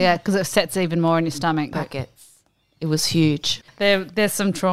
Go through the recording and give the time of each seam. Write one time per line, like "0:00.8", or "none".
0:01.7
0:03.6